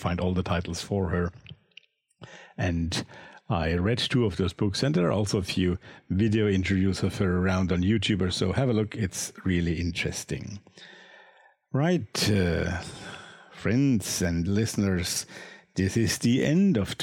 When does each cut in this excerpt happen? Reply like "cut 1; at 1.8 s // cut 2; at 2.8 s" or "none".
none